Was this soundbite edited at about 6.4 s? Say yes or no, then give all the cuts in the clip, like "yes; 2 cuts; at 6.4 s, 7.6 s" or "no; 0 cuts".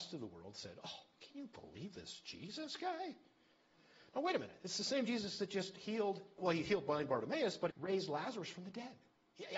yes; 2 cuts; at 6.4 s, 7.7 s